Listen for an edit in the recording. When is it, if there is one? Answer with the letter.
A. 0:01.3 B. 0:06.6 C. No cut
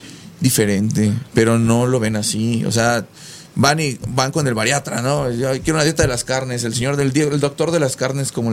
A